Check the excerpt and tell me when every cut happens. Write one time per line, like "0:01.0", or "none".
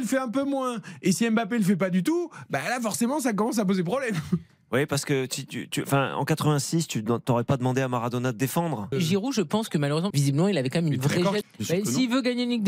0:08.9
0:10.1
0:11.4

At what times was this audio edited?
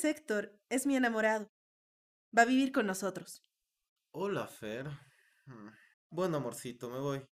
0:04.0
0:05.9

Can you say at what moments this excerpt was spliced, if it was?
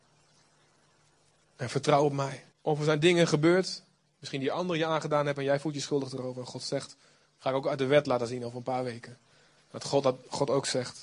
0:02.5

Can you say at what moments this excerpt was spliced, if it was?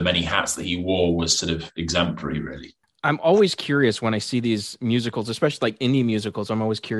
none

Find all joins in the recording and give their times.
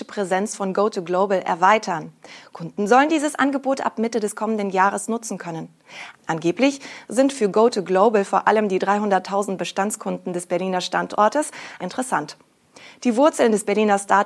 0:02.4
0:06.1
0:11.8

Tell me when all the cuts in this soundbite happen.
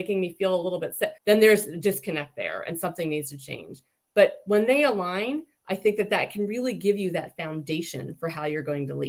0:01.2

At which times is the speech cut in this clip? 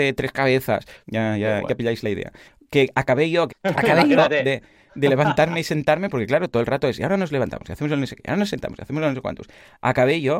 0:01.0
0:03.5

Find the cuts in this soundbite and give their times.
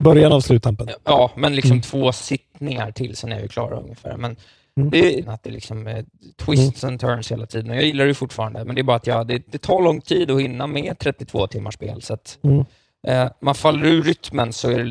0:05.2

